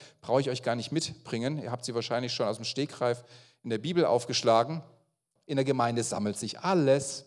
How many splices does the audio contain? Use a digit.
1